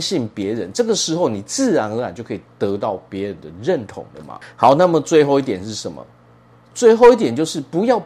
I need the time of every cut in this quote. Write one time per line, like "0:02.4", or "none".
none